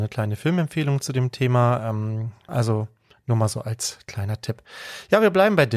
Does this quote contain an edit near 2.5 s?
yes; 1 cut; at 2.5 s

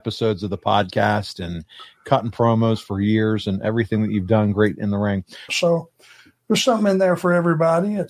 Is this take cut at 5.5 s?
yes; 1 cut; at 5.5 s

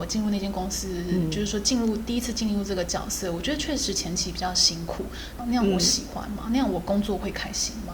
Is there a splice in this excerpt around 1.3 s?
no; 1 cut; at 5.4 s

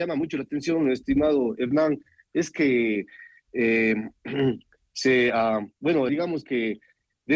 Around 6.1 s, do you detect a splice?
yes; 1 cut; at 6.1 s

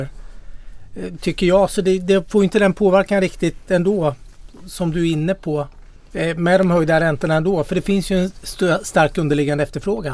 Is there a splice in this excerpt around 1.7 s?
no; 0 cuts

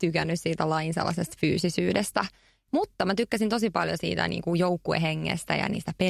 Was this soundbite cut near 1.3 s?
no; 2 cuts; at 2.7 s, 4.0 s

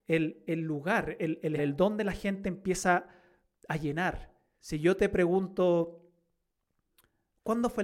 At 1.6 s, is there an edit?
yes; 2 cuts; at 1.6 s, 4.6 s

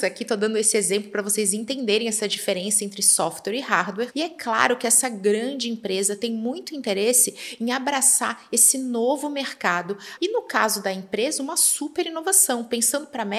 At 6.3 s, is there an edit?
no; 1 cut; at 10.2 s

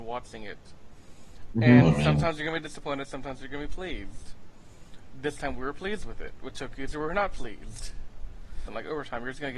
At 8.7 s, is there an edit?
yes; 1 cut; at 8.7 s

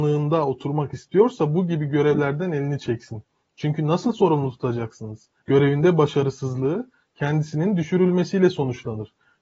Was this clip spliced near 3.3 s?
no; 1 cut; at 5.4 s

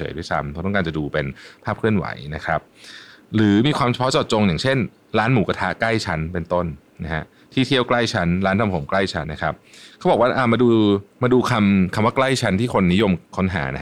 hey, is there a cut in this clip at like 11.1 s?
yes; 2 cuts; at 9.2 s, 11.1 s

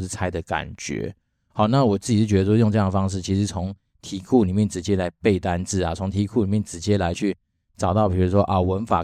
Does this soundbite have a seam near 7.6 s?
no; 0 cuts

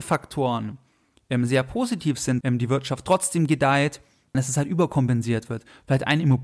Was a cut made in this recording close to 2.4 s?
yes; 2 cuts; at 2.4 s, 4.3 s

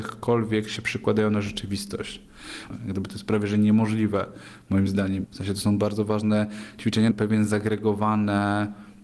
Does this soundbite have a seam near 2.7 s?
yes; 3 cuts; at 2.7 s, 5.2 s, 7.1 s

